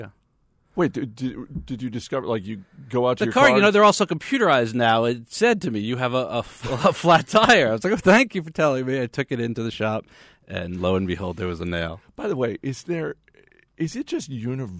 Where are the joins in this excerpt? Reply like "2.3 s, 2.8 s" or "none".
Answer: none

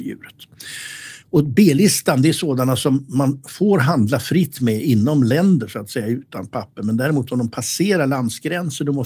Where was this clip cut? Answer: none

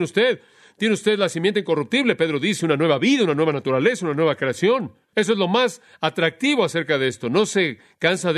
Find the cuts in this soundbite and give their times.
5.1 s

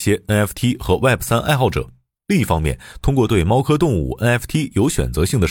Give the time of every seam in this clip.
none

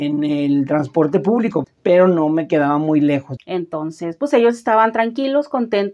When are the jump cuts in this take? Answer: 1.6 s, 3.4 s

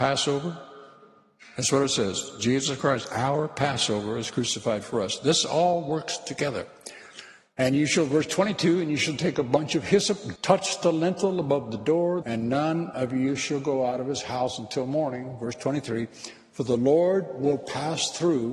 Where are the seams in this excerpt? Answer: 10.4 s, 12.2 s

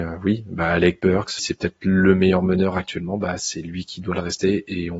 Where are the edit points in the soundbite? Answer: 1.4 s

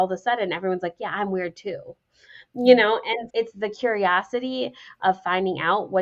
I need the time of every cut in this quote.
3.3 s

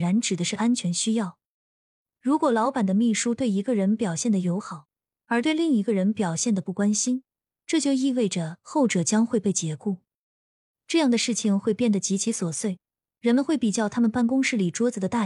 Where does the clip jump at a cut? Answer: 2.2 s, 10.7 s

